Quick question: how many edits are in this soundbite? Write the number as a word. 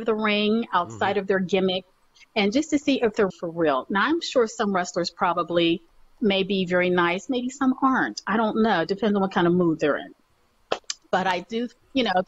one